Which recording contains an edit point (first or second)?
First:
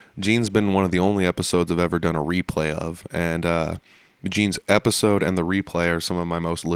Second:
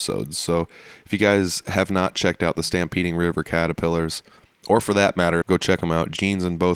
second